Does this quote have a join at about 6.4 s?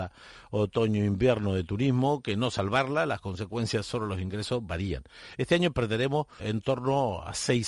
yes; 1 cut; at 6.4 s

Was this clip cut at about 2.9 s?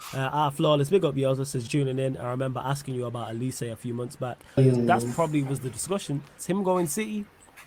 no; 3 cuts; at 1.7 s, 4.6 s, 6.4 s

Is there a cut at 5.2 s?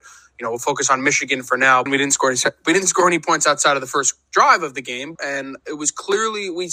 yes; 2 cuts; at 1.9 s, 5.2 s

